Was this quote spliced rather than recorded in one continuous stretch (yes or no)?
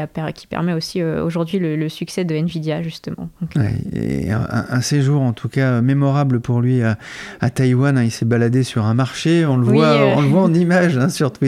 no